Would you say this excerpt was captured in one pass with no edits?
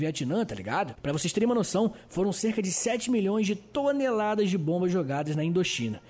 no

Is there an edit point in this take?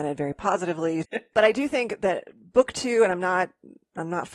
yes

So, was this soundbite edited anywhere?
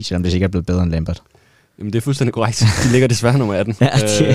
no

